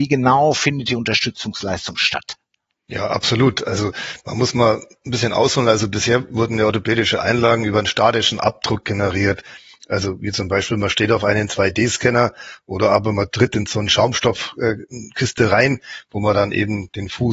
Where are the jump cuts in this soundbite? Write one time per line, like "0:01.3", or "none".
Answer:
none